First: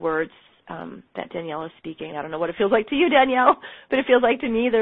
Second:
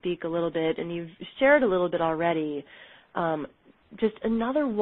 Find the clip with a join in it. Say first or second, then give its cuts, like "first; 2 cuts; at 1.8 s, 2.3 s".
first; 1 cut; at 2.1 s